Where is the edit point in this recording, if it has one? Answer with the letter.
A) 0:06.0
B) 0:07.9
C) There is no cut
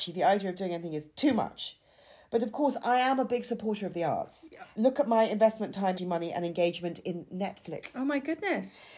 A